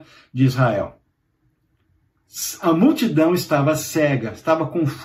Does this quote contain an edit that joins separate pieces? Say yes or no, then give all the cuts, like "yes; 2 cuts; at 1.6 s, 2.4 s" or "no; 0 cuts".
no; 0 cuts